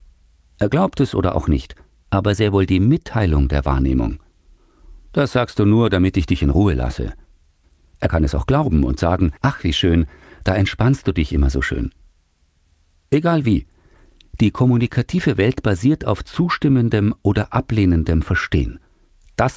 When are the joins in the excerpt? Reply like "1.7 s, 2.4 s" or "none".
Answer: 2.0 s, 9.4 s